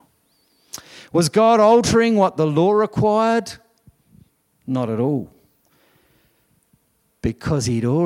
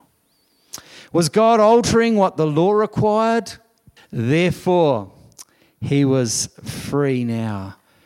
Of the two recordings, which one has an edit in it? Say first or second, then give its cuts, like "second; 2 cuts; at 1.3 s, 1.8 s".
second; 1 cut; at 4.0 s